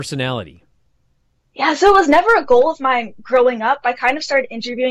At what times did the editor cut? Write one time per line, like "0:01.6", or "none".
none